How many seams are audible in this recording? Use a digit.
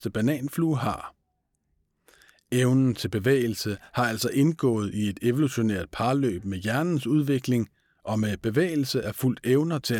0